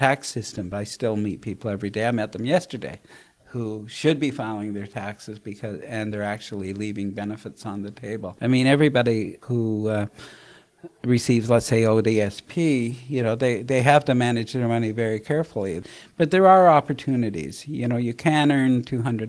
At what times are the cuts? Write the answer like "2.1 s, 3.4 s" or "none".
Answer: none